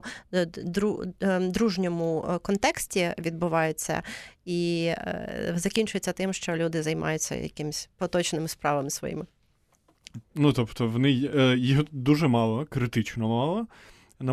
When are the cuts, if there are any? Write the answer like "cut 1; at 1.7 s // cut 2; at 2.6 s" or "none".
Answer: cut 1; at 10.2 s